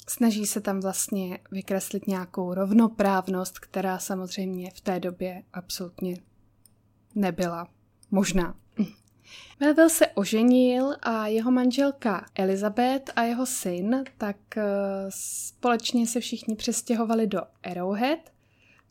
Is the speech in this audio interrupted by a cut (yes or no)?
yes